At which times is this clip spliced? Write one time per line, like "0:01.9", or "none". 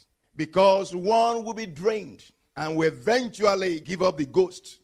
0:02.5
0:03.8